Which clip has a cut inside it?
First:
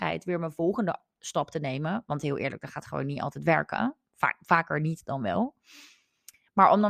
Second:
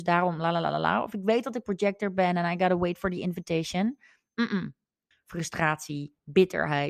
second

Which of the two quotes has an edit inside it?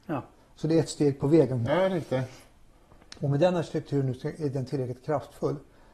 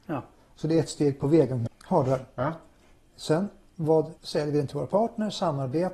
second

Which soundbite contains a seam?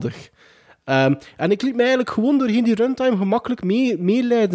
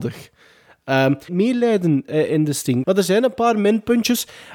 second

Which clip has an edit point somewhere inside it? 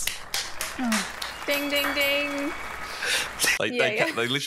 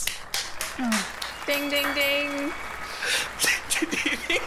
first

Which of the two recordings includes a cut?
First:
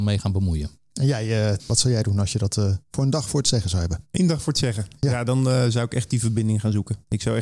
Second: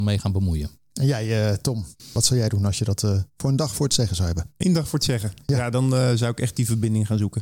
first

